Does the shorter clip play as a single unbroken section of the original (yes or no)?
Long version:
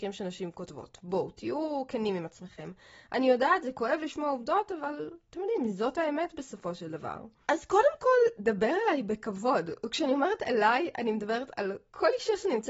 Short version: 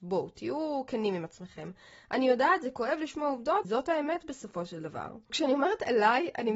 no